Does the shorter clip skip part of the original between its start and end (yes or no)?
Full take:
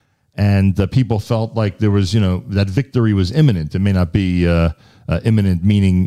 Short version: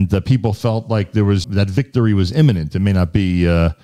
yes